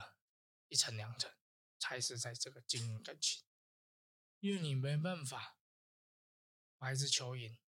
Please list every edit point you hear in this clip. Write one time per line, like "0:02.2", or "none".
none